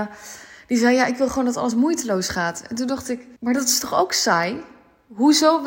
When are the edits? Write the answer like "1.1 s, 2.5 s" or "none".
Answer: 3.4 s